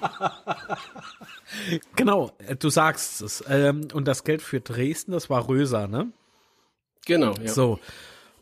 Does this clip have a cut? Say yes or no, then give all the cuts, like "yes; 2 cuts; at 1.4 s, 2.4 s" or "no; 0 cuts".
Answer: yes; 1 cut; at 1.8 s